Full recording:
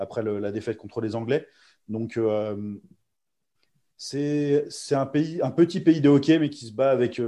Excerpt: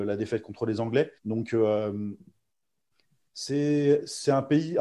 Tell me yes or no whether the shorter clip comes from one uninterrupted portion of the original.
no